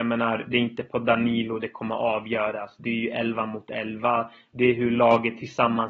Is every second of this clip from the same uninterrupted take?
yes; 0 cuts

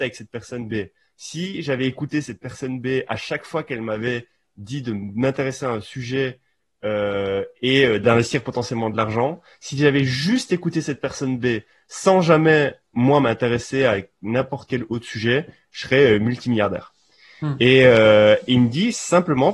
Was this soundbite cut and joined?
no; 0 cuts

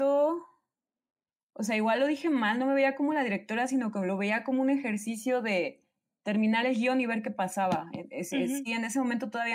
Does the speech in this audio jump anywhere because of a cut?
no; 0 cuts

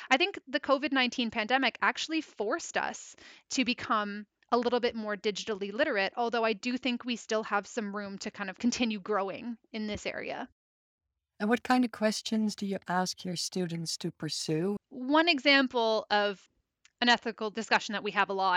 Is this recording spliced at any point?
yes; 1 cut; at 14.8 s

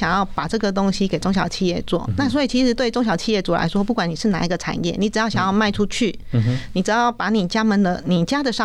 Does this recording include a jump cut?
no; 0 cuts

